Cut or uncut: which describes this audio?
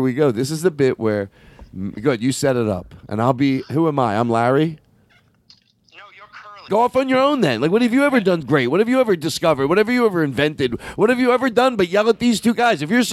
cut